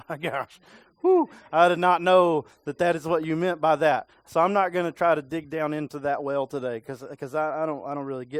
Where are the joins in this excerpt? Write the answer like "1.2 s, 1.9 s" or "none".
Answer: none